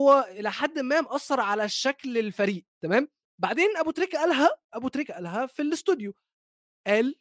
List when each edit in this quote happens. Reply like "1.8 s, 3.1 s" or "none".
2.7 s